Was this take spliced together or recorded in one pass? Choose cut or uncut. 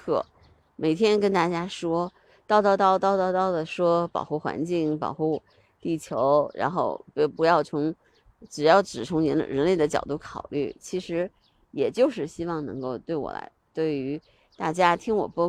uncut